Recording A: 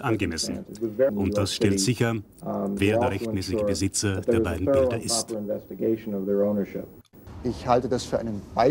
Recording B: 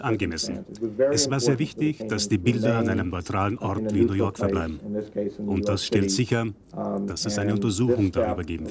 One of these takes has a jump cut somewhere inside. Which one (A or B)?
A